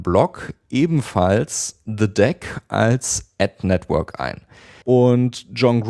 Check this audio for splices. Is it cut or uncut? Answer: cut